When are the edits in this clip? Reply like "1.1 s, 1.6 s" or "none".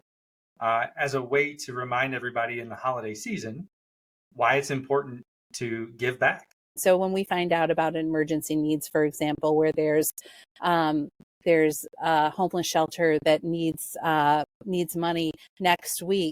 6.8 s